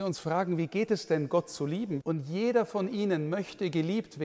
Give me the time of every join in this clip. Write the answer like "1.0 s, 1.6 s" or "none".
2.0 s